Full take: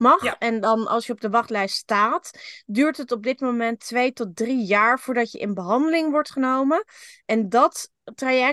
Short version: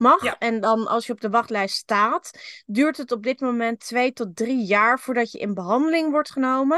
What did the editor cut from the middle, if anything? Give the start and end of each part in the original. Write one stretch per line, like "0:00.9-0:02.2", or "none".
none